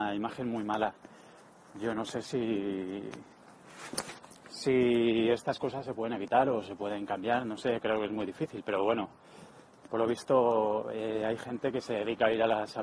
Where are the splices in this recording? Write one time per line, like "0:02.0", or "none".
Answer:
none